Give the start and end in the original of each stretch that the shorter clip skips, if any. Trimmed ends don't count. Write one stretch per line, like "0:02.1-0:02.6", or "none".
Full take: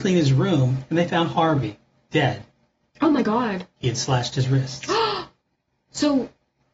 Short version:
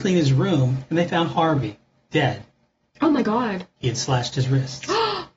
none